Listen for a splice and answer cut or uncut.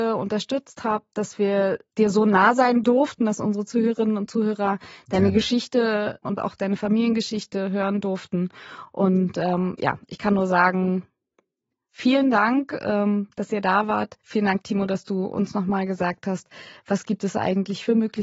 uncut